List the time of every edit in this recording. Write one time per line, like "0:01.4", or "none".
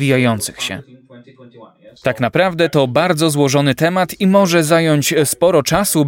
0:02.0